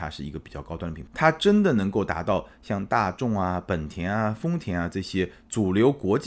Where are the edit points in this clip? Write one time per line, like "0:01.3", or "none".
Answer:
0:01.1